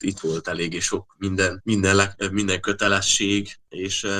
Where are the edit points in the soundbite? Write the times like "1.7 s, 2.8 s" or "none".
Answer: 1.6 s